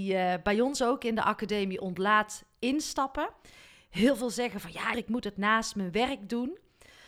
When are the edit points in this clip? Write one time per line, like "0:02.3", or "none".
0:04.9